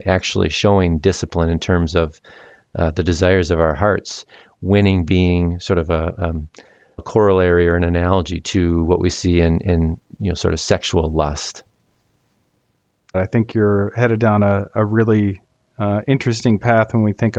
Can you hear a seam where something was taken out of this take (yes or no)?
yes